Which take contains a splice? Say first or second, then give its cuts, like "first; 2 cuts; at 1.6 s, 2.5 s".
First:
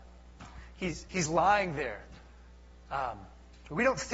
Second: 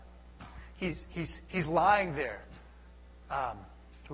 first; 1 cut; at 1.1 s